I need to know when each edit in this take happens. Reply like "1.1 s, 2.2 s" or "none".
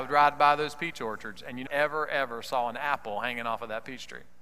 1.7 s